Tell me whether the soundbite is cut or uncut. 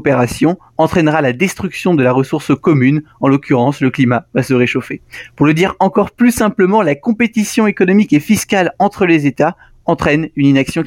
uncut